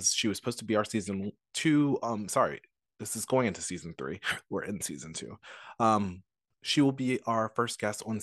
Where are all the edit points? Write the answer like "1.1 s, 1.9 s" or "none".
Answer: none